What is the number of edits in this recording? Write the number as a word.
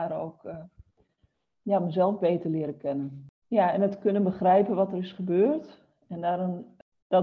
zero